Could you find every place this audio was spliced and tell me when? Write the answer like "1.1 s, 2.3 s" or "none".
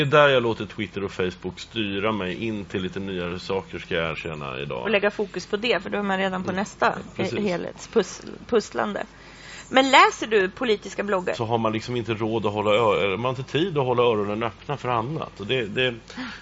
4.8 s, 11.3 s